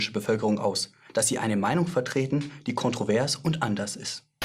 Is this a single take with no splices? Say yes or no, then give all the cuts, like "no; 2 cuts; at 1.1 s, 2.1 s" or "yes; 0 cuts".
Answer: yes; 0 cuts